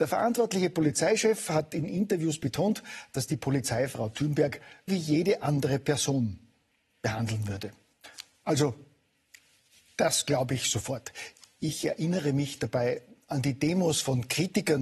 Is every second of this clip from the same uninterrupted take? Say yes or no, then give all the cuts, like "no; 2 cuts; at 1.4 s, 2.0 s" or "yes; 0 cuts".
no; 1 cut; at 4.9 s